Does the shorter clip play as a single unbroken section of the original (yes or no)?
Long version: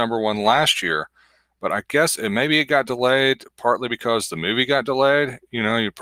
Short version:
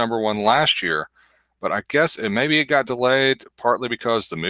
yes